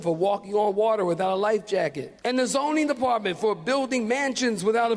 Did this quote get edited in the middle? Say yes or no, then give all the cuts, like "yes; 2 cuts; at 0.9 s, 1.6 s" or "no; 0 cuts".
yes; 1 cut; at 2.2 s